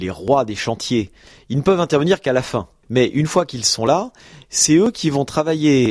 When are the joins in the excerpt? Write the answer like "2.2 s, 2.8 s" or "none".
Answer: 2.8 s